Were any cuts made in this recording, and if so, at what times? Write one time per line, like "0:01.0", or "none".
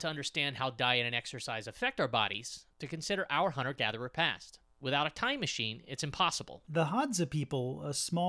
0:04.6
0:06.6